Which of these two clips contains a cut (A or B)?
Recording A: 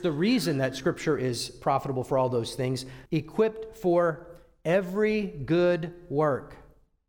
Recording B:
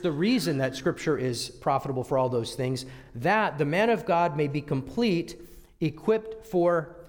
A